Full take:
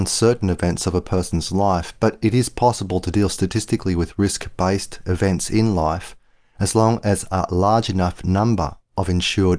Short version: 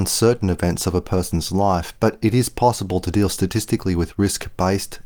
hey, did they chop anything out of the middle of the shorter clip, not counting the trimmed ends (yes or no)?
no